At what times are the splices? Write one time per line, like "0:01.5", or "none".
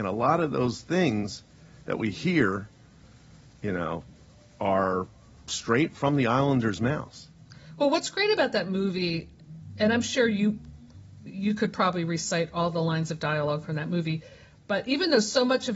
none